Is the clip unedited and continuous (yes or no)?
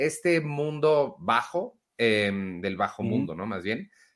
yes